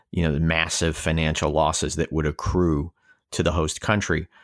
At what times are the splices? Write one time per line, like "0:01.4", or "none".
none